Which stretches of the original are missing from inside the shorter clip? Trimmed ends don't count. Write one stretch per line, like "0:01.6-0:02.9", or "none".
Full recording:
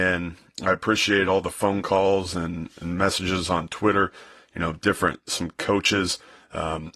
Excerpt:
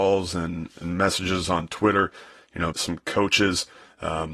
0:04.7-0:05.2